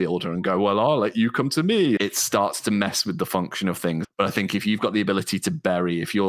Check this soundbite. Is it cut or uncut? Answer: cut